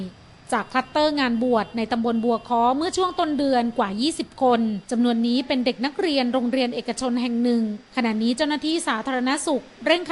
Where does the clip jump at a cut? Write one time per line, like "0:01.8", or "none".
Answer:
0:04.8
0:07.9